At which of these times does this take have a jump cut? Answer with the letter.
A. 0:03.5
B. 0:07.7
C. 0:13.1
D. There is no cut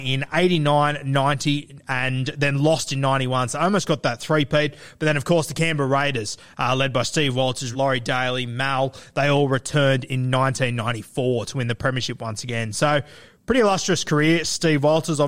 B